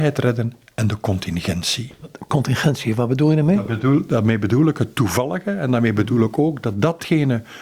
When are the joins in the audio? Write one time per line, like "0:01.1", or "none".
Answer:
none